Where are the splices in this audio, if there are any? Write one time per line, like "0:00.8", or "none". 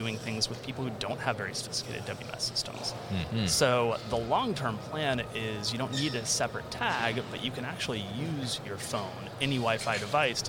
0:03.3

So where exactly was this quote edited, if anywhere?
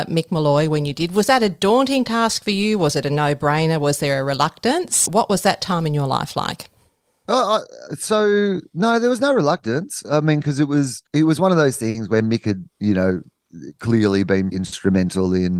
0:05.1
0:11.1
0:14.5

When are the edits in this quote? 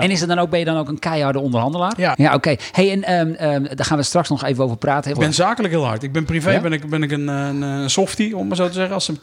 0:02.1
0:05.1

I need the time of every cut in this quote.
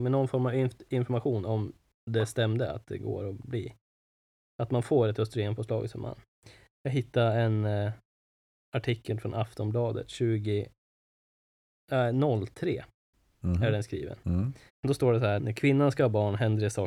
0:14.7

